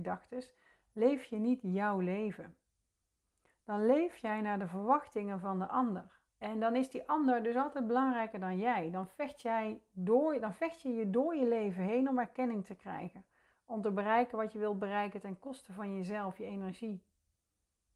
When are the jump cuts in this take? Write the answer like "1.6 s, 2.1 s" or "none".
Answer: 6.3 s